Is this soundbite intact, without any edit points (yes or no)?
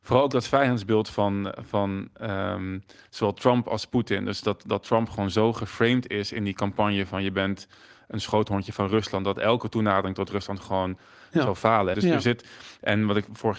no